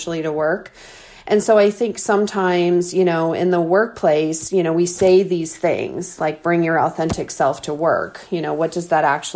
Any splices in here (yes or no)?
no